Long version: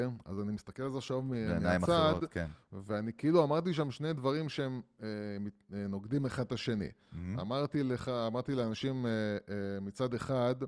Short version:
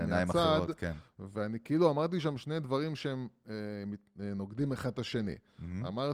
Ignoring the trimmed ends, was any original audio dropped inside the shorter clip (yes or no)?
no